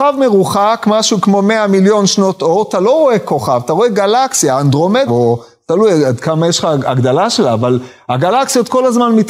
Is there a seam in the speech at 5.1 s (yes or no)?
yes